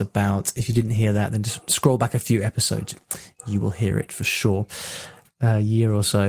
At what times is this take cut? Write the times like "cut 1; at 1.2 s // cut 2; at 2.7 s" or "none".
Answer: cut 1; at 5.2 s